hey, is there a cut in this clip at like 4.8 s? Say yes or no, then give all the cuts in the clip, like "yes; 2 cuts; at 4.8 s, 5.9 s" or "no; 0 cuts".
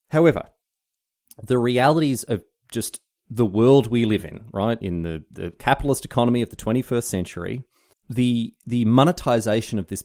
yes; 2 cuts; at 4.8 s, 7.9 s